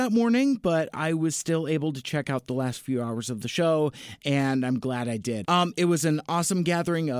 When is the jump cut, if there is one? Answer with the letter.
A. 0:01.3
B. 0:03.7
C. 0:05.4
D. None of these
C